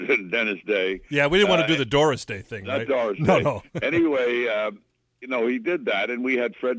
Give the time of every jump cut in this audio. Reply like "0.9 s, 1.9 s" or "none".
none